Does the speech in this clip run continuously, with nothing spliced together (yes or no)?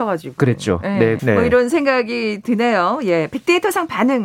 no